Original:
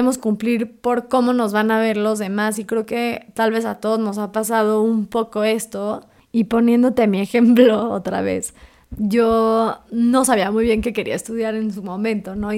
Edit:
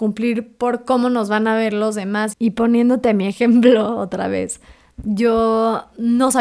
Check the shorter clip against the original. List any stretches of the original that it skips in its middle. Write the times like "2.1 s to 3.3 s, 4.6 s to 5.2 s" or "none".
2.6 s to 6.3 s